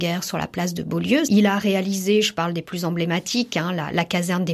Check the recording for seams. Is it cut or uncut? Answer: cut